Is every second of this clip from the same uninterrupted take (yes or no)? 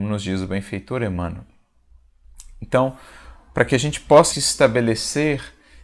no